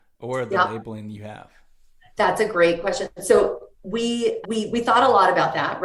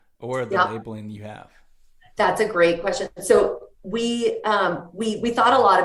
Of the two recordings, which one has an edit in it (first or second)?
first